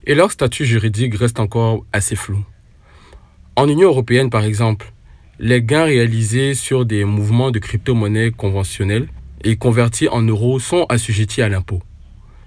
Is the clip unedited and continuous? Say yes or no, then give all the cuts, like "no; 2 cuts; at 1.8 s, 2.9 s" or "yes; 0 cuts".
yes; 0 cuts